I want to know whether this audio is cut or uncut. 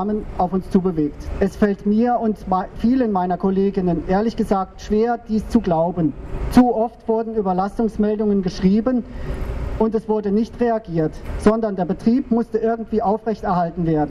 cut